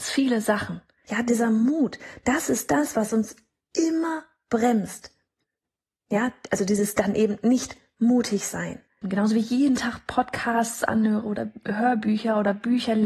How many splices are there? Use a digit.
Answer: 2